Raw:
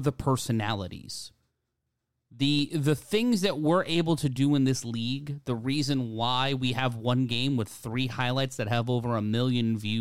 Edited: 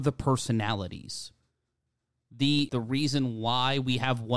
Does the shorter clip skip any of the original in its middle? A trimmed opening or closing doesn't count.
yes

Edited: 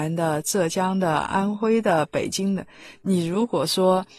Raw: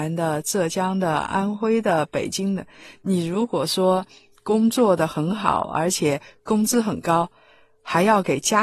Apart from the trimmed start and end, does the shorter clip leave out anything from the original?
no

